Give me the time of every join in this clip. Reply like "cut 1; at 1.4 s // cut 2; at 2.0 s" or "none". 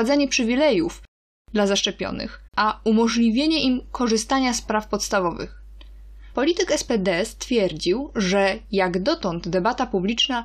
cut 1; at 2.5 s // cut 2; at 6.3 s